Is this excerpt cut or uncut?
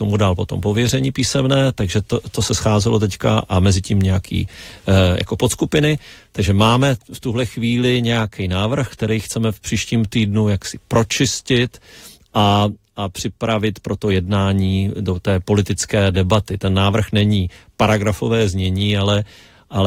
uncut